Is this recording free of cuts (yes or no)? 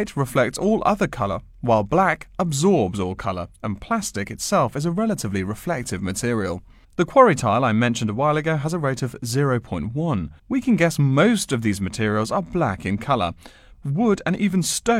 no